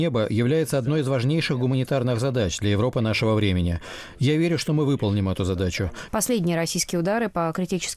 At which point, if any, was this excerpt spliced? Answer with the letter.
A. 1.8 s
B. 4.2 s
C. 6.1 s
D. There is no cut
C